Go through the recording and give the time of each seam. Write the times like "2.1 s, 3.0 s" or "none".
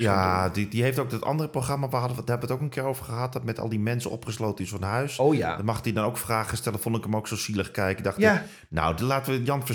none

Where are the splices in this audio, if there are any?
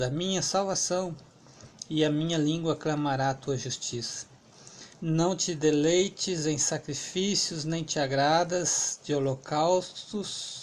4.9 s

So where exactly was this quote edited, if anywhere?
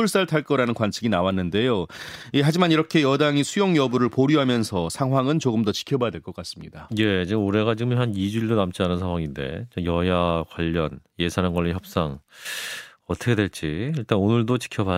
none

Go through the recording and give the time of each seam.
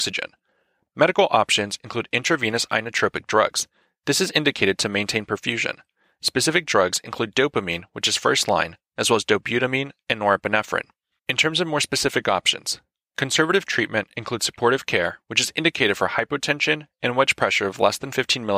11.2 s

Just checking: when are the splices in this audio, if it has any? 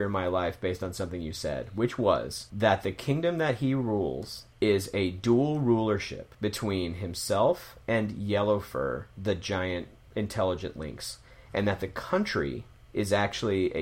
none

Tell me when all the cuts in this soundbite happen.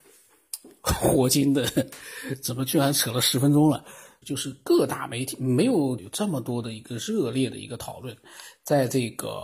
4.2 s, 6.0 s

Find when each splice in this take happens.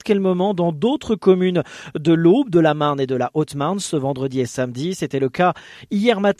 none

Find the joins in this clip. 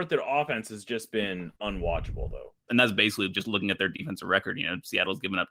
2.7 s

